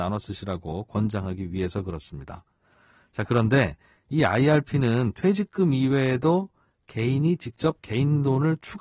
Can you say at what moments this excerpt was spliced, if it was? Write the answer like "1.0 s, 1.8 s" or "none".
none